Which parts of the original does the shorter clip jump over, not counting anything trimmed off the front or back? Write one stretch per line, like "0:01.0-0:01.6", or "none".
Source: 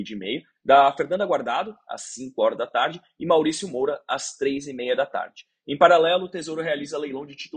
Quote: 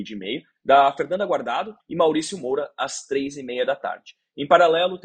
0:01.8-0:03.1